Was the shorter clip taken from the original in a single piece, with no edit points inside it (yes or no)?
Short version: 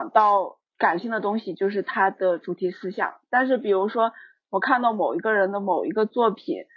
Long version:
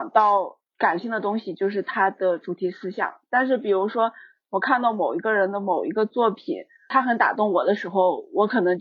yes